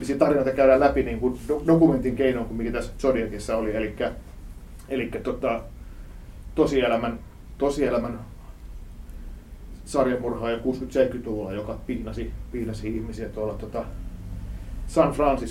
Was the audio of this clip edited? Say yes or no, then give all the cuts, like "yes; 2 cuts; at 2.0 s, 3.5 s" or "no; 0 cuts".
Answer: no; 0 cuts